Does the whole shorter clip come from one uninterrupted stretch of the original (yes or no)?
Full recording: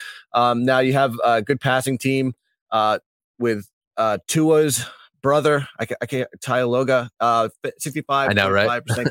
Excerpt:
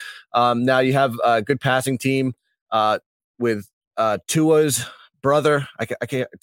yes